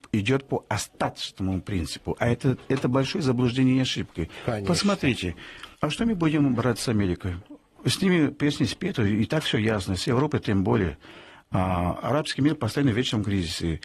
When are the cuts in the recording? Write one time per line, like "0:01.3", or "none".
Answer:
0:05.7